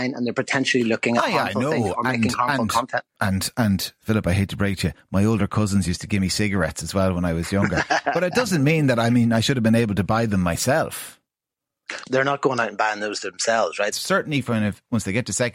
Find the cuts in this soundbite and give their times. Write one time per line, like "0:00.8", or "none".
0:12.0
0:13.9